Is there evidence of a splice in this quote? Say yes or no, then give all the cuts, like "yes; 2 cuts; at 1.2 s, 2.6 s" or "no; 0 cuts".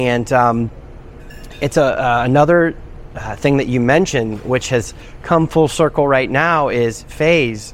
no; 0 cuts